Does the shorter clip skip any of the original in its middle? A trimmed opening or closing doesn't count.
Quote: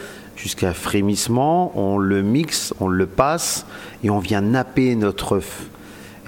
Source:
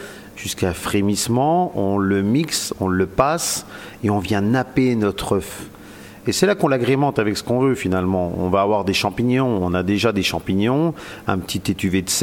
no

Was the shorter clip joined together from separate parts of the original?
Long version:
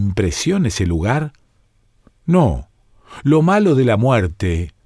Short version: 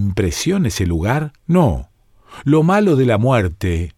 yes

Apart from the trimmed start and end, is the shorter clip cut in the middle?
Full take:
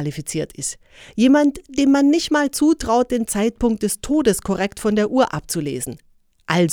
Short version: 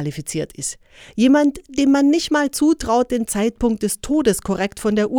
no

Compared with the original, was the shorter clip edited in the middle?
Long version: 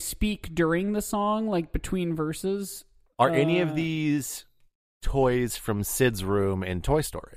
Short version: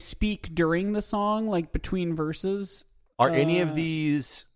no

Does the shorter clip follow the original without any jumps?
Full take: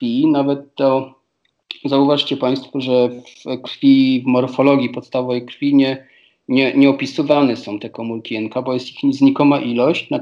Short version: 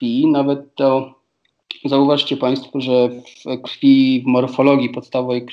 yes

